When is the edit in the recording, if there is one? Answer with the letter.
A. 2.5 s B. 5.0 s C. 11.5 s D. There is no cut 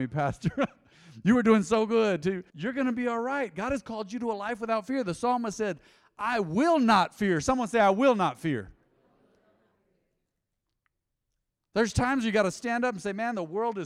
A